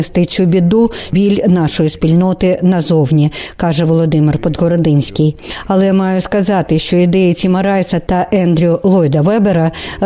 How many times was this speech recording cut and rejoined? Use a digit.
0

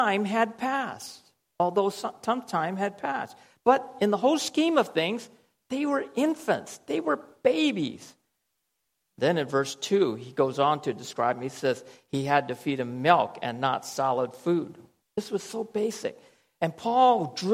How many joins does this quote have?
1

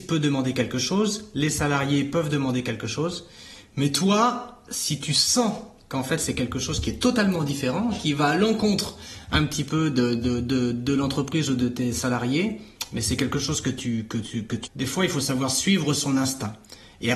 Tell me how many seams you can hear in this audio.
1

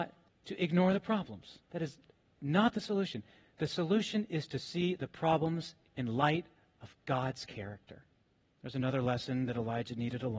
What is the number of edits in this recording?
1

